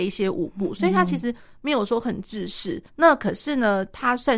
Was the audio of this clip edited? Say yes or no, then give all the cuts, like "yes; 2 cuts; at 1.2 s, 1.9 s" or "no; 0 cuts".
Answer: yes; 1 cut; at 2.9 s